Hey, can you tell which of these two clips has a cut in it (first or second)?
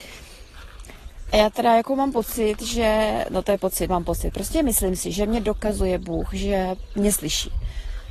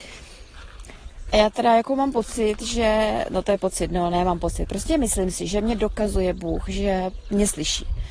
first